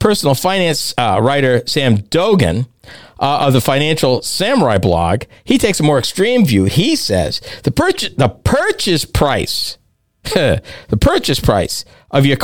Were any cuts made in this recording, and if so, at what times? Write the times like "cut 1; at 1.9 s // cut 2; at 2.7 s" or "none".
none